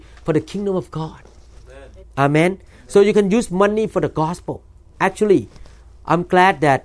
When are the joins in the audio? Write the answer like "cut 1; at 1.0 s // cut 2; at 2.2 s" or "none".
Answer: cut 1; at 2.0 s